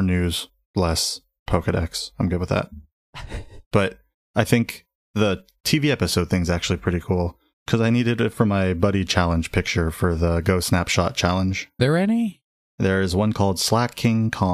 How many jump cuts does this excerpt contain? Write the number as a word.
two